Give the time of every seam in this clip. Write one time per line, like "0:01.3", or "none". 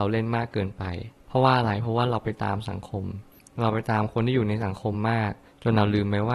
none